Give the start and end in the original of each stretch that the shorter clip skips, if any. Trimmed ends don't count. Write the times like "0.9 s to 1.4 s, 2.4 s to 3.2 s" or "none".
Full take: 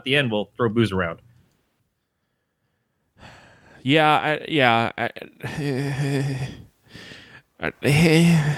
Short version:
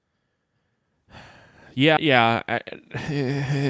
4.0 s to 4.5 s